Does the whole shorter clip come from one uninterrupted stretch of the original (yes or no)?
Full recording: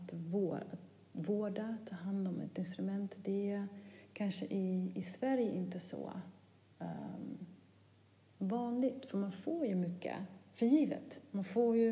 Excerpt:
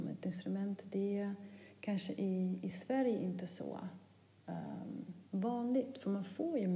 no